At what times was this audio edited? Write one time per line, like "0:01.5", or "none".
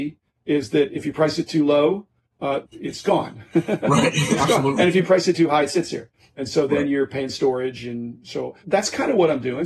0:02.6
0:08.6